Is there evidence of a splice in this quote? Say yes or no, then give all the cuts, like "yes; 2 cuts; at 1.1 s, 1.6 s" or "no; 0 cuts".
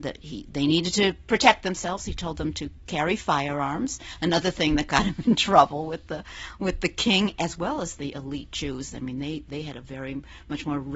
no; 0 cuts